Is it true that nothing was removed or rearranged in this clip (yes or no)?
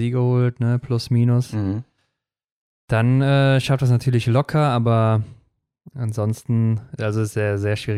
yes